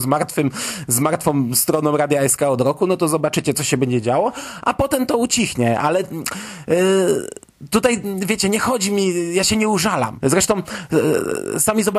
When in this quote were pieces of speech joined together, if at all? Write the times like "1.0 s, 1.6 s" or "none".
10.2 s